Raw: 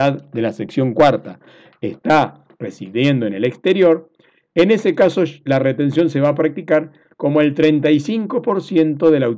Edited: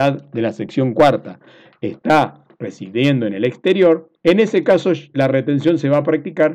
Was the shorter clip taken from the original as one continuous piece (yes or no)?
no